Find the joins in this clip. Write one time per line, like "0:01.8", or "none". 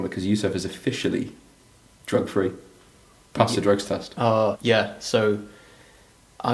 0:04.5